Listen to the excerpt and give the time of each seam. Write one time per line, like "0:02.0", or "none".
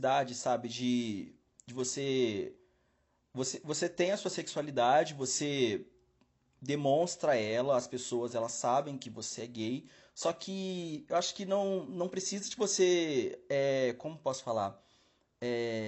none